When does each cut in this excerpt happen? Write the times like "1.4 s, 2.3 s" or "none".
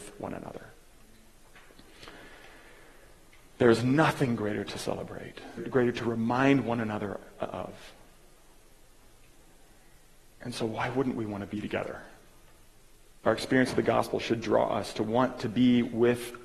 5.6 s, 13.2 s

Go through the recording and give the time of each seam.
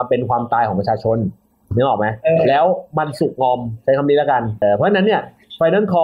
4.6 s

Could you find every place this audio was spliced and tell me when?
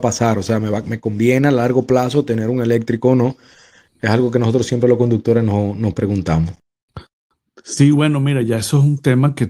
none

